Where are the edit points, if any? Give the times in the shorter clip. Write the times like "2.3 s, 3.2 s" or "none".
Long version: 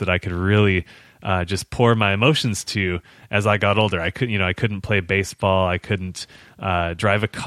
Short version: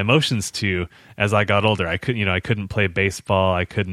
none